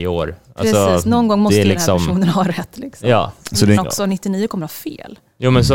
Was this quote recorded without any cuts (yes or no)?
no